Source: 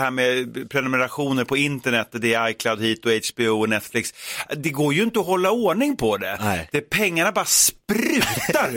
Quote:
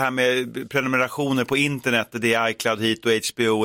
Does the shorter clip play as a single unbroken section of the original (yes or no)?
yes